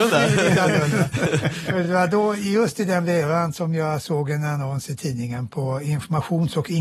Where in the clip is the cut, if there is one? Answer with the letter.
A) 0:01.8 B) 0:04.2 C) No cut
C